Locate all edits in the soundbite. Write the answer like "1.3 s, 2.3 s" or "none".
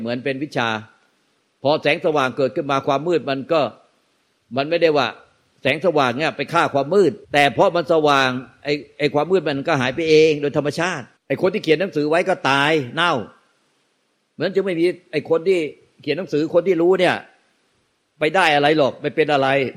7.2 s, 11.2 s